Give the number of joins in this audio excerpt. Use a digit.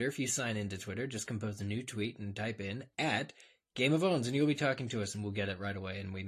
0